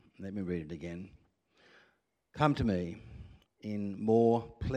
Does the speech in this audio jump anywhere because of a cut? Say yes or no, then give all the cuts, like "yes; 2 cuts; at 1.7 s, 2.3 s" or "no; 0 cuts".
yes; 1 cut; at 3.4 s